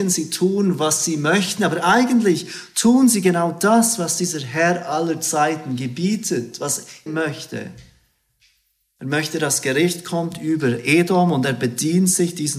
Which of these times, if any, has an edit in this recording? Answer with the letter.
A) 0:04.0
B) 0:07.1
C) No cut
B